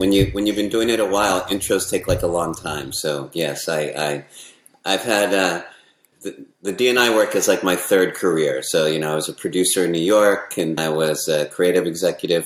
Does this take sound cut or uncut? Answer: cut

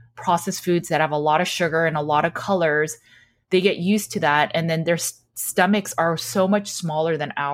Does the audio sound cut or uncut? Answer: uncut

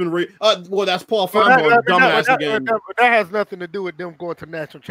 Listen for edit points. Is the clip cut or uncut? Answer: uncut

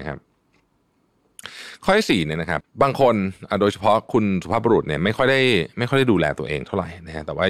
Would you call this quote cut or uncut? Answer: cut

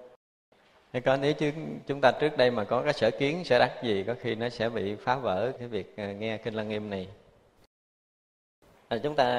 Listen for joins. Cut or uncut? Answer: cut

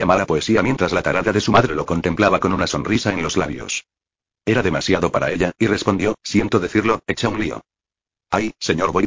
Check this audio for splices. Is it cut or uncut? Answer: uncut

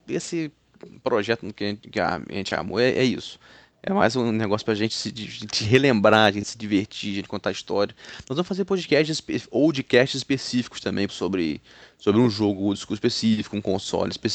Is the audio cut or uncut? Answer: cut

